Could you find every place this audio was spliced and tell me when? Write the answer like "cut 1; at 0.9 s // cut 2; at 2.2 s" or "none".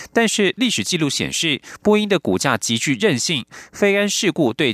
none